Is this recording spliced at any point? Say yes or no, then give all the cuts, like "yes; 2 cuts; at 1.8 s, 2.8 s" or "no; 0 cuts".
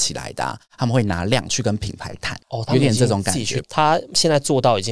yes; 2 cuts; at 2.4 s, 3.6 s